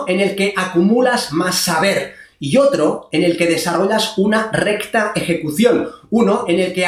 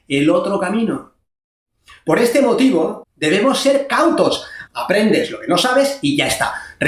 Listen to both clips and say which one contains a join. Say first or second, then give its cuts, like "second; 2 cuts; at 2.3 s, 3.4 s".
second; 2 cuts; at 3.0 s, 4.7 s